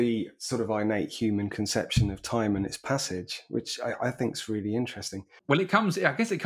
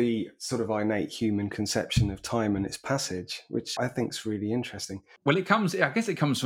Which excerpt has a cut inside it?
second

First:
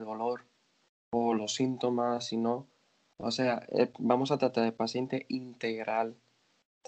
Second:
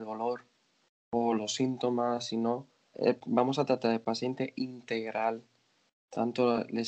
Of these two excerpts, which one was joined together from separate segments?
second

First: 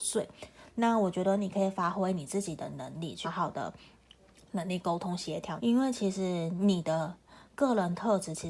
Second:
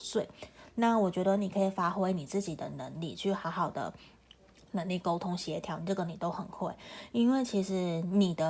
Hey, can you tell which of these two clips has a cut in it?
first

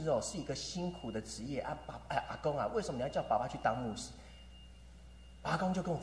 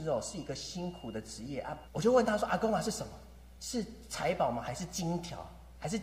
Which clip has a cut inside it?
second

